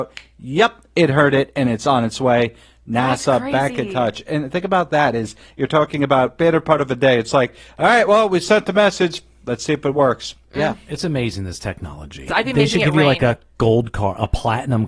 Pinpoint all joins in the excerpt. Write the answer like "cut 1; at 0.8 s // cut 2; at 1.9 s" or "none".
cut 1; at 10.4 s // cut 2; at 12.3 s